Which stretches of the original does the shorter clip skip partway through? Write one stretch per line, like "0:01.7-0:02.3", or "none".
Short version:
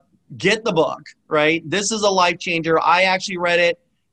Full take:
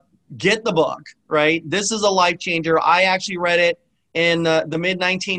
none